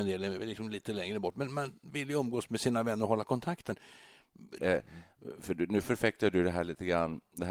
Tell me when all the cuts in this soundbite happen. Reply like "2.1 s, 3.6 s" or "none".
4.6 s